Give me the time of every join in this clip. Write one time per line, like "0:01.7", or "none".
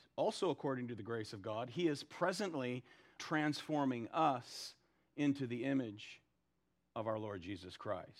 0:03.2